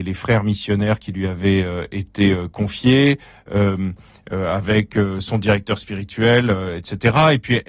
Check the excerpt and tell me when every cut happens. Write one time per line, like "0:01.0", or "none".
none